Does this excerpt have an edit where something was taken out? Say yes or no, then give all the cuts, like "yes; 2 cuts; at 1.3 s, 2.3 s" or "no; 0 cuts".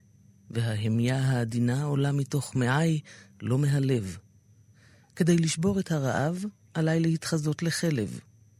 no; 0 cuts